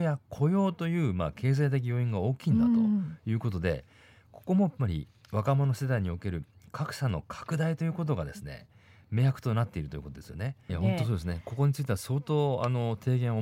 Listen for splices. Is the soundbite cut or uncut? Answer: cut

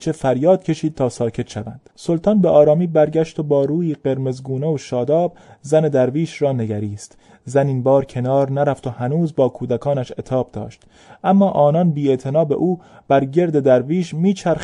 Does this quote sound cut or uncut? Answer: cut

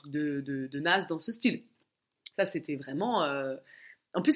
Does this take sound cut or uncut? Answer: cut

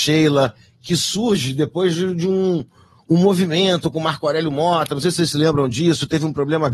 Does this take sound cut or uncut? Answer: uncut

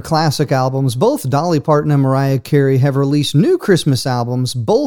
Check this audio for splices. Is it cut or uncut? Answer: uncut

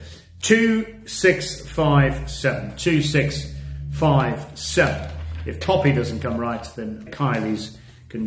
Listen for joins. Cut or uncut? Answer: cut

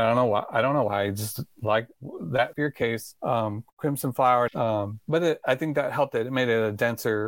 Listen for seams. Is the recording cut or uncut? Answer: cut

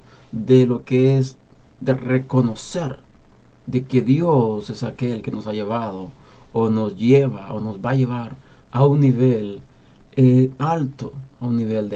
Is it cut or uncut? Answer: uncut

